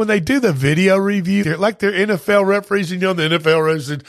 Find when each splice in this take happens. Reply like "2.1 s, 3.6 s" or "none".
1.4 s